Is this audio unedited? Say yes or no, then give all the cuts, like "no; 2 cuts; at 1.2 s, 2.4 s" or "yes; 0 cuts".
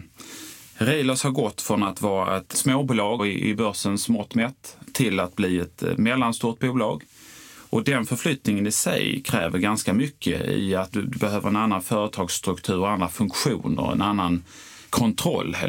no; 1 cut; at 3.2 s